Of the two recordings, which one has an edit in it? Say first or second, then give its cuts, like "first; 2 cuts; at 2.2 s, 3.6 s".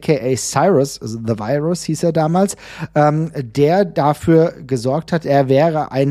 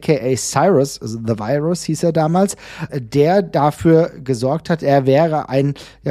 second; 1 cut; at 2.9 s